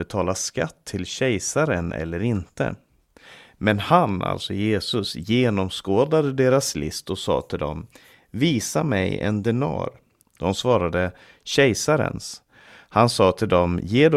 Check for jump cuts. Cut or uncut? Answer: cut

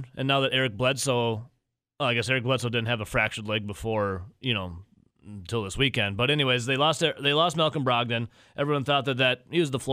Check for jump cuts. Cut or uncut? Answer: uncut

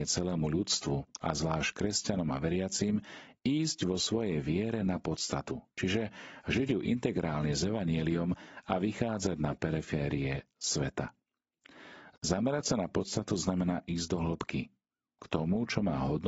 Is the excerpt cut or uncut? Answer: uncut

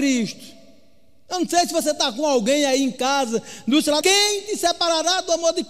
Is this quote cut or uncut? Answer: cut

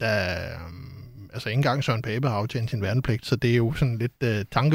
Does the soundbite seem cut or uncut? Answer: uncut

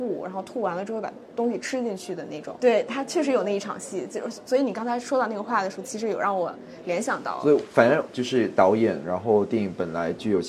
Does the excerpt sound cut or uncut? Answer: uncut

